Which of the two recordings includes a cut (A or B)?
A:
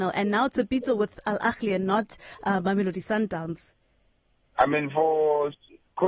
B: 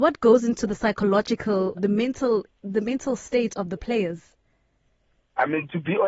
B